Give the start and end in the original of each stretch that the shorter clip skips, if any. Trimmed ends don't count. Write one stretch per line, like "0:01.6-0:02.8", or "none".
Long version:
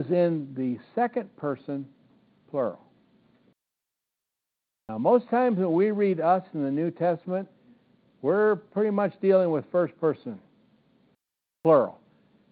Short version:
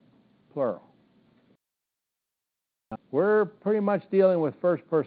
0:04.9-0:08.1